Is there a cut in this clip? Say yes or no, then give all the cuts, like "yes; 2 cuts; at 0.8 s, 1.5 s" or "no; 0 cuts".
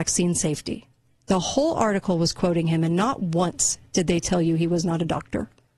no; 0 cuts